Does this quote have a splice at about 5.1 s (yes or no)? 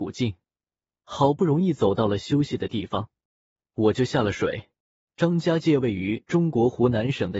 yes